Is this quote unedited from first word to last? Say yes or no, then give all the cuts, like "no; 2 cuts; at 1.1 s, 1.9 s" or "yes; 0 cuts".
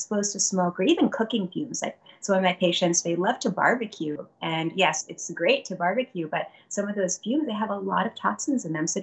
yes; 0 cuts